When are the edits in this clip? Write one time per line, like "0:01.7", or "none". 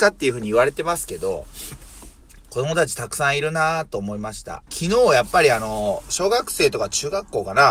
0:04.7